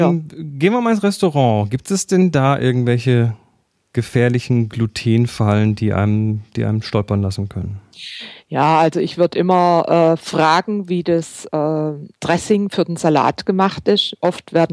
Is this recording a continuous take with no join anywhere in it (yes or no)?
yes